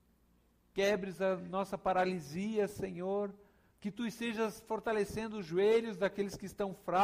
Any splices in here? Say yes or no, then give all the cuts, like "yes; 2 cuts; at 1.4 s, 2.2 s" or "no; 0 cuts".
yes; 1 cut; at 3.7 s